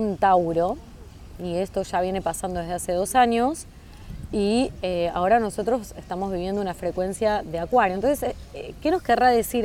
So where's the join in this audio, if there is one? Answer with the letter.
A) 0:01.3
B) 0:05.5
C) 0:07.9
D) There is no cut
D